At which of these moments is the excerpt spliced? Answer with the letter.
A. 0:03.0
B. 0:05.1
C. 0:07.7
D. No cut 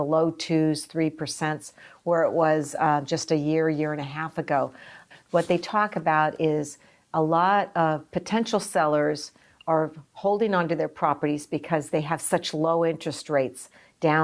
B